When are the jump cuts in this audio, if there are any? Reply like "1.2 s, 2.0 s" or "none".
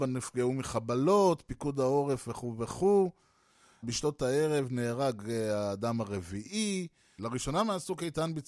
3.8 s, 7.2 s

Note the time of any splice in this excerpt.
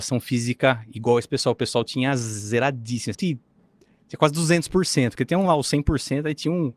3.1 s

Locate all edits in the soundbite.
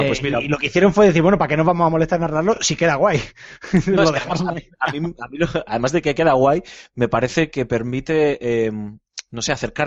none

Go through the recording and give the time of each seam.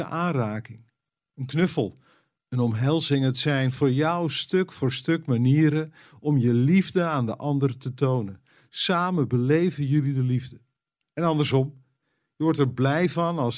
11.0 s

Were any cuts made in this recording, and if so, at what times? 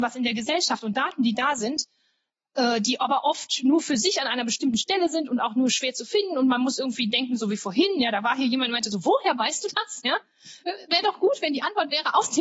none

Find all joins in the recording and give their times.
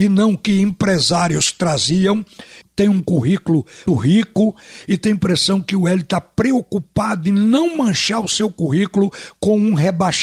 2.6 s, 3.9 s

